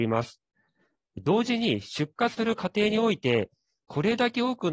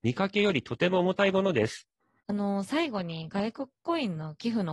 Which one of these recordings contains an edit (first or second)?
second